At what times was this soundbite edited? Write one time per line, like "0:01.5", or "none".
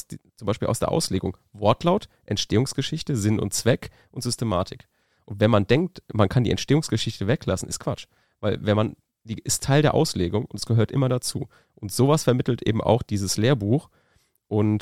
none

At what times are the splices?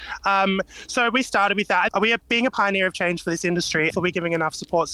0:01.9
0:03.9

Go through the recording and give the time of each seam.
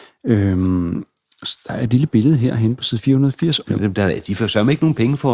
0:03.6

